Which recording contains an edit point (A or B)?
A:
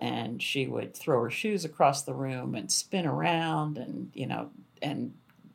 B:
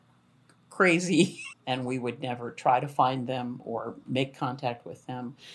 B